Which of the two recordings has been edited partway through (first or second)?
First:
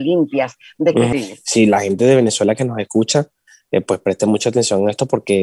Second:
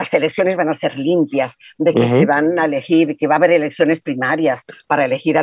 first